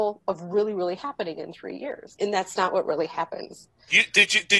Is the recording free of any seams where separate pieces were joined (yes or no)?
no